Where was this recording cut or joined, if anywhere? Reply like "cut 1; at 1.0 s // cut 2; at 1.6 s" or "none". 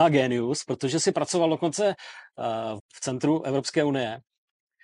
cut 1; at 2.8 s